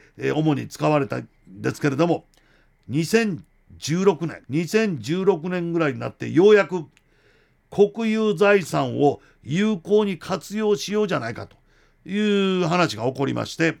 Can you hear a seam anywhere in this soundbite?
yes; 1 cut; at 4.4 s

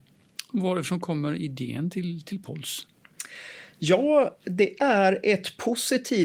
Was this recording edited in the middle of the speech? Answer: no; 0 cuts

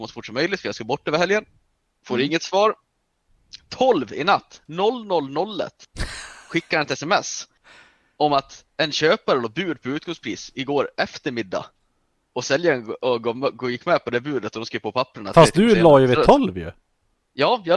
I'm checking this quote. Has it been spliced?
no; 0 cuts

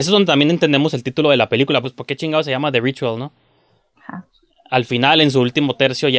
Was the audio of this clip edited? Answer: yes; 1 cut; at 1.8 s

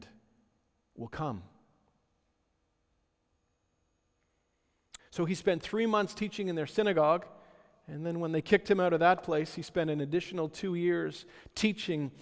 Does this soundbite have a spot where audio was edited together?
yes; 1 cut; at 5.0 s

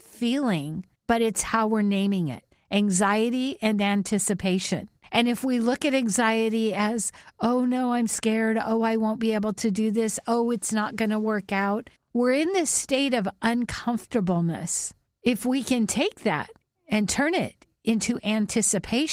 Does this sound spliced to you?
no; 0 cuts

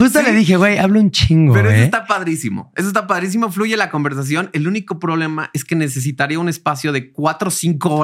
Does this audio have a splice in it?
no; 0 cuts

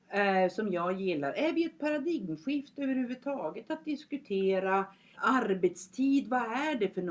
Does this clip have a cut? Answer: yes; 1 cut; at 5.1 s

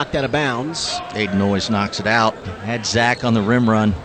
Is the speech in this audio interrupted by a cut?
yes; 1 cut; at 2.4 s

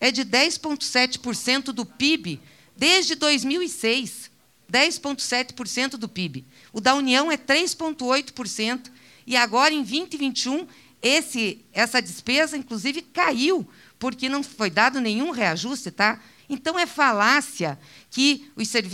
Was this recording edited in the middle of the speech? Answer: yes; 2 cuts; at 11.7 s, 16.4 s

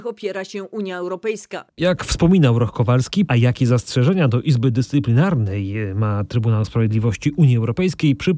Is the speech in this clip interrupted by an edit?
yes; 2 cuts; at 1.7 s, 3.3 s

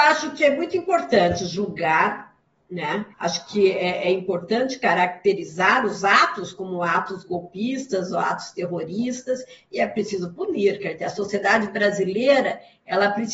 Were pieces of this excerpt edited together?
yes; 1 cut; at 3.1 s

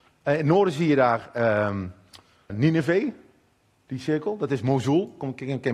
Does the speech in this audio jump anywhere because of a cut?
yes; 1 cut; at 2.5 s

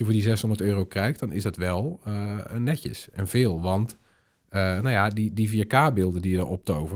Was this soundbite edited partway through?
no; 0 cuts

